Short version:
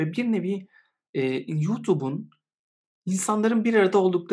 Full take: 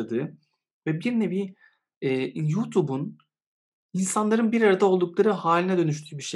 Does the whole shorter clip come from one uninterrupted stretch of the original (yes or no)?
yes